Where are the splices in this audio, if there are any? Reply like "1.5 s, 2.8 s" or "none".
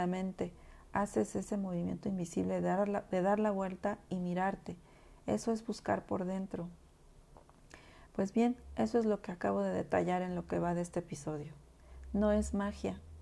8.1 s